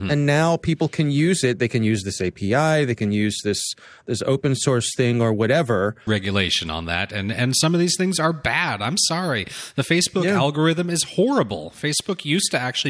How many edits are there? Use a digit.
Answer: 1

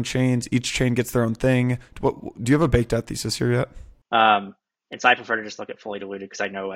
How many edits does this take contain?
2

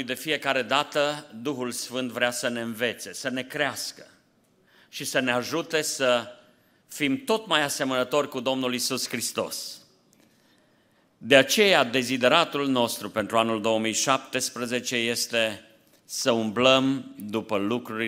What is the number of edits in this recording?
0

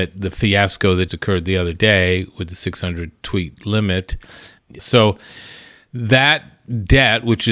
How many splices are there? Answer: 2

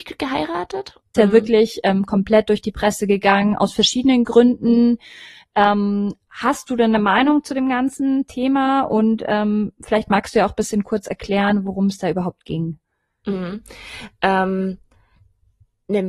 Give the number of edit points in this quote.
1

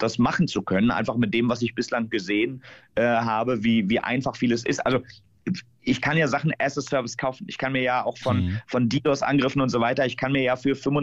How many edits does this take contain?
0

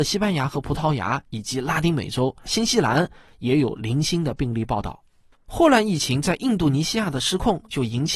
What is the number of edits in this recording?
1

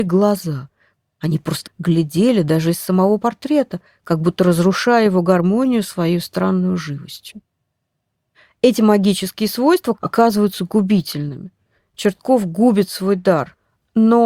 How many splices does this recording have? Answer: 2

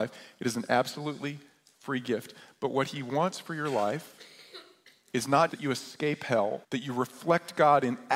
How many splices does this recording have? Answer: 2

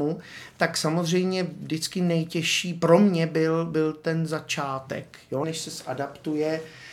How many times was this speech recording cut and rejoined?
1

